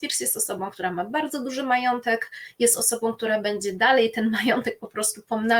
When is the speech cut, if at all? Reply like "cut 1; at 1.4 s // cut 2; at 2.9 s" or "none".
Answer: none